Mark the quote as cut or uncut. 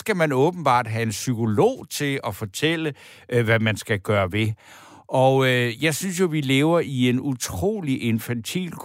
uncut